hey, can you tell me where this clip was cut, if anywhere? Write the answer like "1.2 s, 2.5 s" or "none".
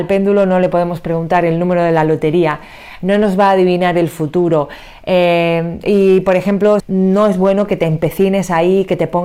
6.8 s